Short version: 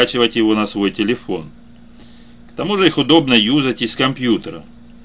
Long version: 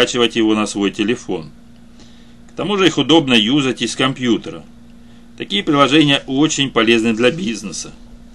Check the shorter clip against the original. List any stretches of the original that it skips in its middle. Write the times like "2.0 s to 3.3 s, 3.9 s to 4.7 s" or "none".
none

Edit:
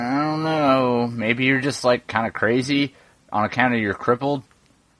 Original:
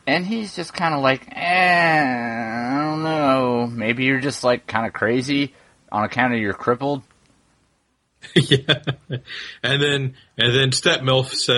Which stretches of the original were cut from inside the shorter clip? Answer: none

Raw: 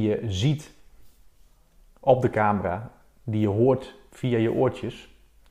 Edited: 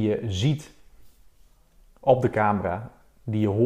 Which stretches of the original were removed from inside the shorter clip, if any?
none

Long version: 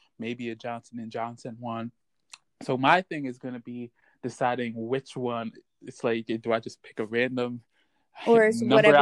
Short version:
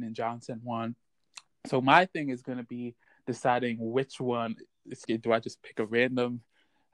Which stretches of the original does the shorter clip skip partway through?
6.0 s to 6.2 s

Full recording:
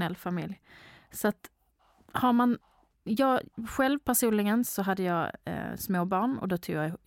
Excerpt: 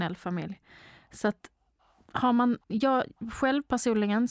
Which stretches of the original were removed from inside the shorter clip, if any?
2.6 s to 3.0 s

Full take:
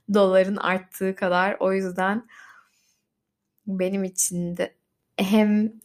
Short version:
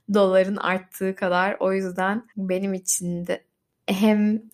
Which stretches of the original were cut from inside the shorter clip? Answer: 2.3 s to 3.6 s

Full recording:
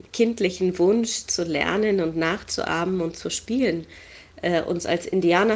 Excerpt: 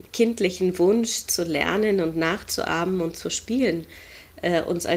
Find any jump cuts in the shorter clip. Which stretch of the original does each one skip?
none

